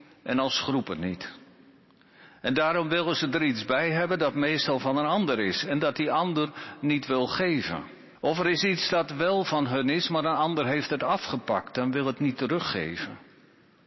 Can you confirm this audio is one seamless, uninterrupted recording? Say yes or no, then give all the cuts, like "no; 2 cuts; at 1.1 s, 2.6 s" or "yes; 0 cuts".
no; 1 cut; at 8.2 s